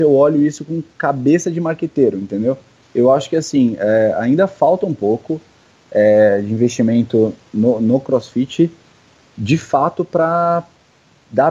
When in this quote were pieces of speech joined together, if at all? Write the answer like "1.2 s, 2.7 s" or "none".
2.8 s